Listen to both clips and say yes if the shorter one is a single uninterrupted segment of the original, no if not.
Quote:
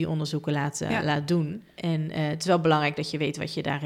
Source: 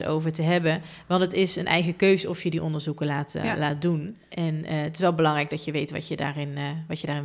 yes